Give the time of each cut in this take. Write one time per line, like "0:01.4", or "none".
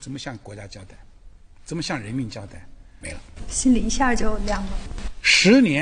0:03.0